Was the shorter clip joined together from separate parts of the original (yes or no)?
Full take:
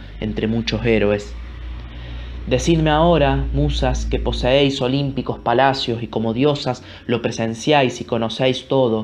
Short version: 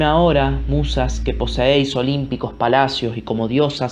no